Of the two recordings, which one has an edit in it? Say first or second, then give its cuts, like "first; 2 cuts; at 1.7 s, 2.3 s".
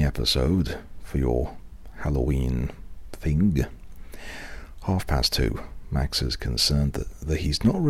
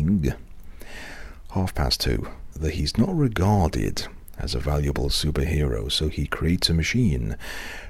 second; 1 cut; at 2.5 s